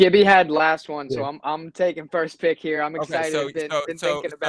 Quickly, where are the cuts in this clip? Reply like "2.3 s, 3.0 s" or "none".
none